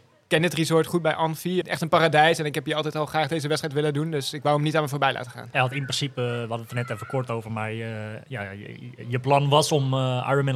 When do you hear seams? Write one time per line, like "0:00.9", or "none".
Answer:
0:01.6
0:05.5